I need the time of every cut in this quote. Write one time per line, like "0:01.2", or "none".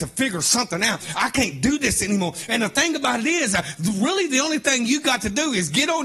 none